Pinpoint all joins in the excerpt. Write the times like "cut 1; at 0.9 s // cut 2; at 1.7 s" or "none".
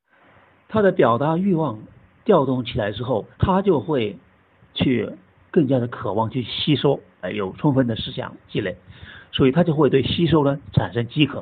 cut 1; at 3.3 s // cut 2; at 7.2 s

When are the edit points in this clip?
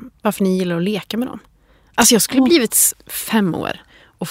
cut 1; at 2.9 s

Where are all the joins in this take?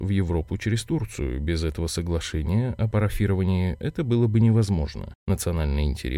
none

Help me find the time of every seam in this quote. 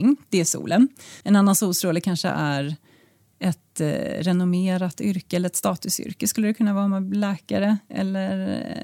cut 1; at 1.2 s

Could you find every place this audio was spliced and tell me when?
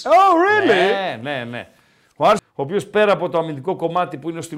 cut 1; at 2.4 s

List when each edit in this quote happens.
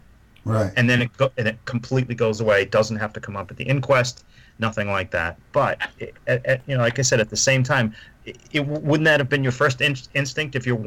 cut 1; at 5.4 s // cut 2; at 8.4 s

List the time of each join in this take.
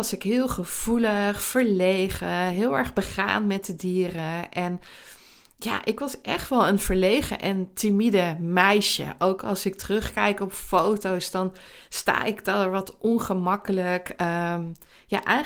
none

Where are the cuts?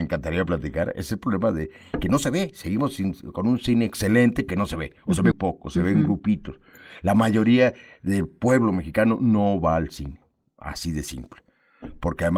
cut 1; at 5.3 s

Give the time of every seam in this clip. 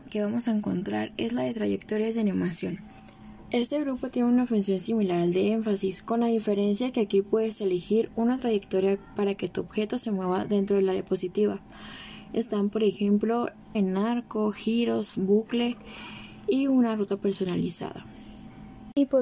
cut 1; at 13.7 s // cut 2; at 15.1 s

